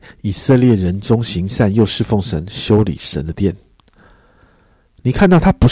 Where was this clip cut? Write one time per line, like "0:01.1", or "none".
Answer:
none